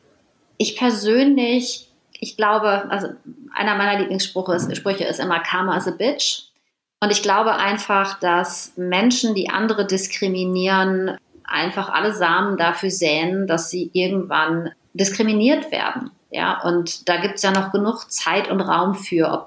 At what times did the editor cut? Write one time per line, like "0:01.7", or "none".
none

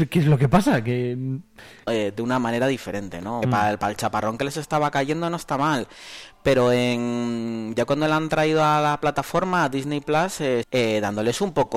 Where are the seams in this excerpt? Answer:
0:01.9
0:03.4
0:10.6

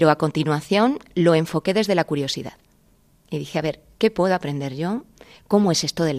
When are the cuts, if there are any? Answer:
none

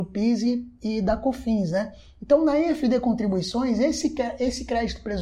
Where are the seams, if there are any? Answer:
none

